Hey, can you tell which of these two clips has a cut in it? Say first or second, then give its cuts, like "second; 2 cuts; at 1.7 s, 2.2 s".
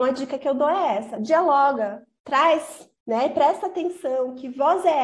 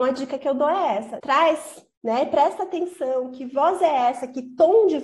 second; 1 cut; at 1.2 s